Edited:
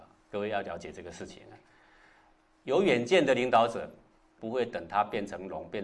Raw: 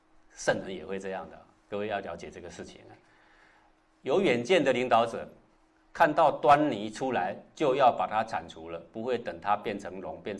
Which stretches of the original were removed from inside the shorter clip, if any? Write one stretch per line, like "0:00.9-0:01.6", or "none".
0:05.8-0:08.9